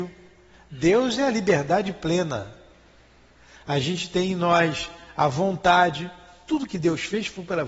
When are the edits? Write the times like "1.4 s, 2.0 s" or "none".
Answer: none